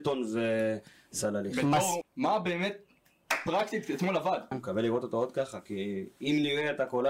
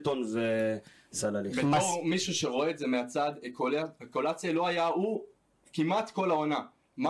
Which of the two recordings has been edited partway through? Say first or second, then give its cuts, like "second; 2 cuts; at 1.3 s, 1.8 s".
first; 2 cuts; at 2.0 s, 4.5 s